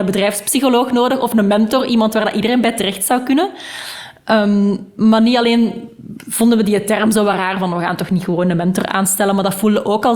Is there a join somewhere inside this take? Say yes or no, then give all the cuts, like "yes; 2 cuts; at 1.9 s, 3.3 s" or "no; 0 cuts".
no; 0 cuts